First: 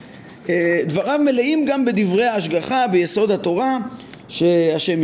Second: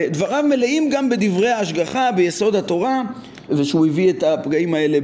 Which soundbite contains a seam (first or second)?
second